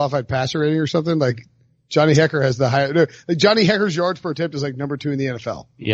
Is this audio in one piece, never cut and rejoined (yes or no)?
yes